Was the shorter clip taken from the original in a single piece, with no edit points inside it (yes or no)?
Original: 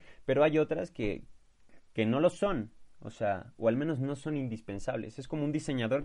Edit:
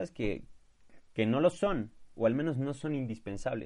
no